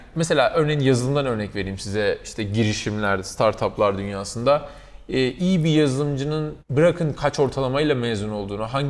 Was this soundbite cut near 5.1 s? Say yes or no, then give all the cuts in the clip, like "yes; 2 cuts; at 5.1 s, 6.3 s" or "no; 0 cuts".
no; 1 cut; at 6.6 s